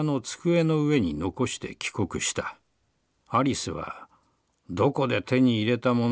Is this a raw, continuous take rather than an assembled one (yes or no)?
no